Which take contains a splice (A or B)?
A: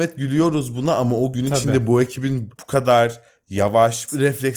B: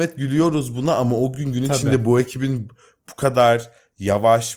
A